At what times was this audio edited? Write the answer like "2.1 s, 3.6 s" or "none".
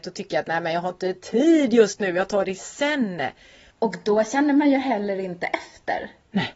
3.7 s